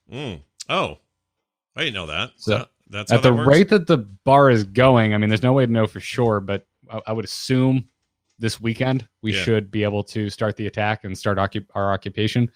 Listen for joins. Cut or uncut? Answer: uncut